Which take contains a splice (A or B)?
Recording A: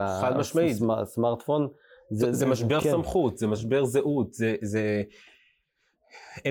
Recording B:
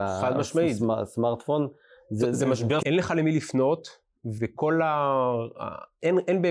B